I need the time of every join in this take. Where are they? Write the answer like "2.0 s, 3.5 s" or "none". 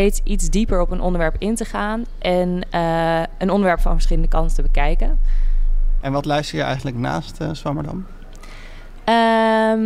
6.0 s